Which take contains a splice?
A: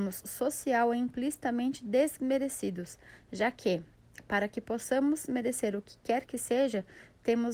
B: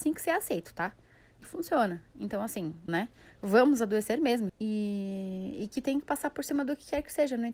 B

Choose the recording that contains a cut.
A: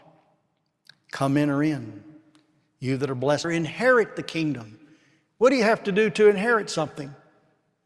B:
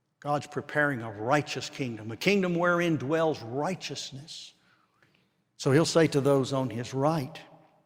A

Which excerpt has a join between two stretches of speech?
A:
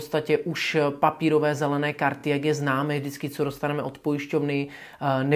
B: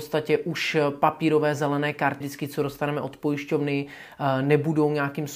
B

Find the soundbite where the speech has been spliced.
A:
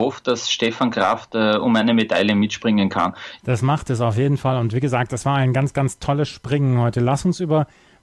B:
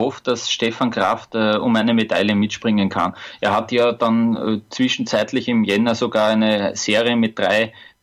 A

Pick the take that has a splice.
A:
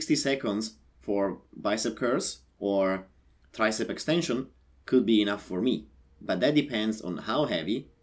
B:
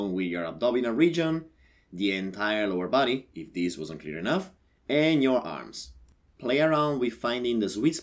B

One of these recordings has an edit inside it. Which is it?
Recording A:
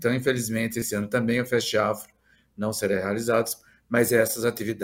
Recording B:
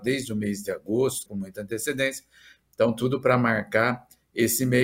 B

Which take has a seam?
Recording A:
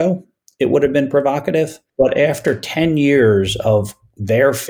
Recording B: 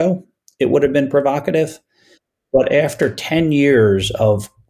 A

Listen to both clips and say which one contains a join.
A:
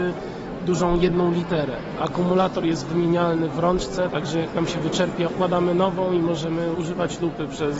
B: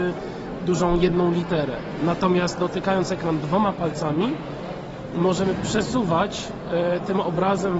A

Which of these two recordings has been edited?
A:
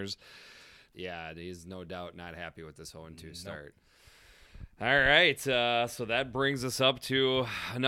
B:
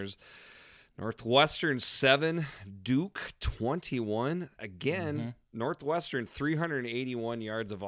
A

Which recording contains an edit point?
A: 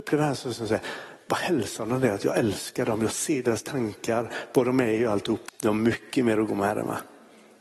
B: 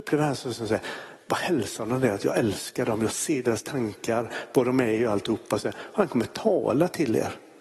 A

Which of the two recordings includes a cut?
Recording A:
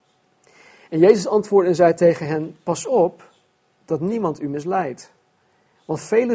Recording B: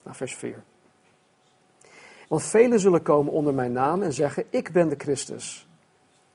B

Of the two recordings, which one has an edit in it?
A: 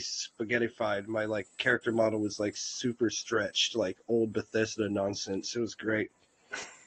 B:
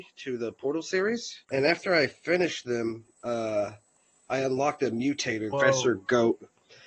B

